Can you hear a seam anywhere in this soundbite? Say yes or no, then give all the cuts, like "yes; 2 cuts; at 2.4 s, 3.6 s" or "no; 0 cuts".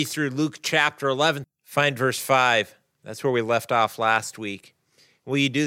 yes; 1 cut; at 1.4 s